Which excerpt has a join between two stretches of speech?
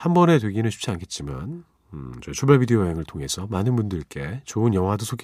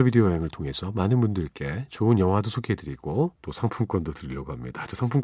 second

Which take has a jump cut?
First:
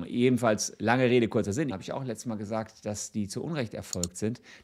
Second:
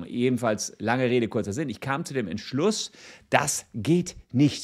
first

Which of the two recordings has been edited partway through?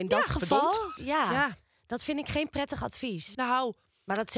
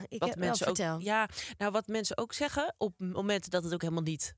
first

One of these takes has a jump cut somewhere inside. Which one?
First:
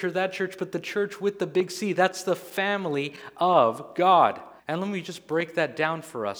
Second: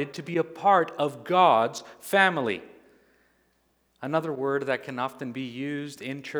first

